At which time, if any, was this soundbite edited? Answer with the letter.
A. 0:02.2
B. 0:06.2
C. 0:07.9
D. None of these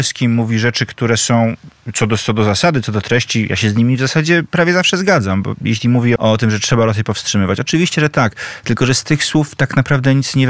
B